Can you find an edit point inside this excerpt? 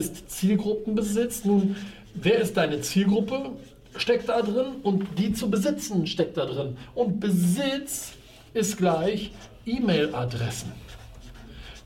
no; 0 cuts

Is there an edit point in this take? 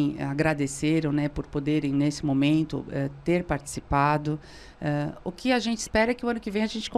no; 0 cuts

